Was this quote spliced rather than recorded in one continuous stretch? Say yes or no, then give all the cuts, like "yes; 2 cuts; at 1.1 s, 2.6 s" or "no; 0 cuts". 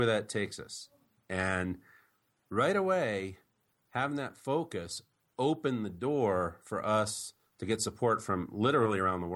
no; 0 cuts